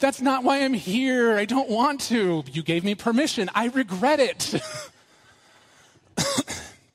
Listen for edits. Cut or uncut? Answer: uncut